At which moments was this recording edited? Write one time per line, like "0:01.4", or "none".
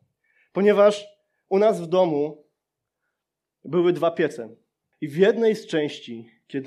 0:04.9